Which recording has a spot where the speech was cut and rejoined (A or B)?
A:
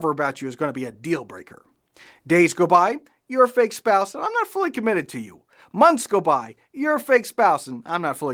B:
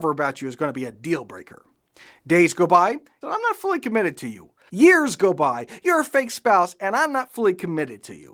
B